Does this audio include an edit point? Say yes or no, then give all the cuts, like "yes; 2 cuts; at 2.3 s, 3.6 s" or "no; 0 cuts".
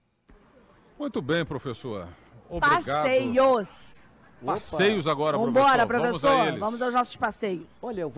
no; 0 cuts